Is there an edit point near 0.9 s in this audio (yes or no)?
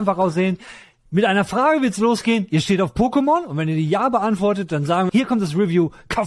no